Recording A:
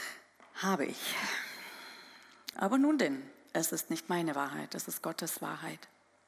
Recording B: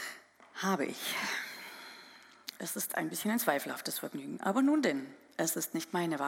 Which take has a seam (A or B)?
A